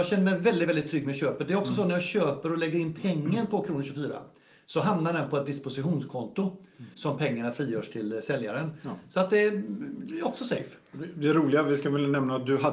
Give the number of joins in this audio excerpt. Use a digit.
1